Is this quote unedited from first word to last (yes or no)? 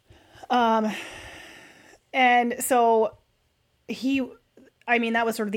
yes